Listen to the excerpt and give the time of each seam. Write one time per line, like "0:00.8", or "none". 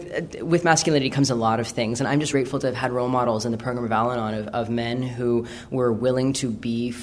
0:02.3